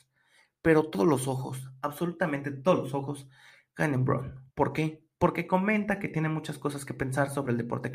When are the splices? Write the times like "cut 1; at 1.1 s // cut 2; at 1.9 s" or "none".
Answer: cut 1; at 4.5 s